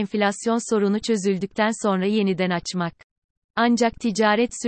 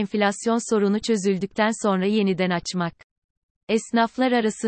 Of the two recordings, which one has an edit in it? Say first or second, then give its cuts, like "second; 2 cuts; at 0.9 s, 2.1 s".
first; 1 cut; at 3.4 s